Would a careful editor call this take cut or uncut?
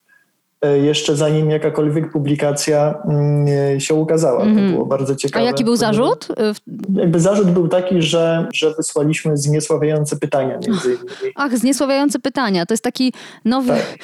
uncut